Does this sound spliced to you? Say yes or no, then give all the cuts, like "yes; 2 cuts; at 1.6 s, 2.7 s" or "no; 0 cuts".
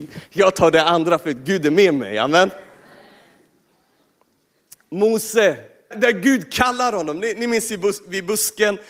yes; 1 cut; at 5.9 s